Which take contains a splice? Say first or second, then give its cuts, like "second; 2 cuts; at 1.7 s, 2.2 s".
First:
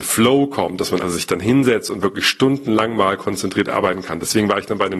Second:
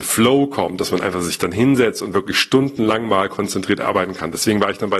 first; 1 cut; at 1.0 s